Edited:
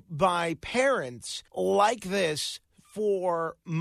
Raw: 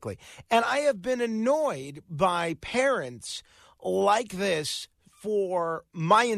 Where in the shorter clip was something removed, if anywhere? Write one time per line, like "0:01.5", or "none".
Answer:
0:01.5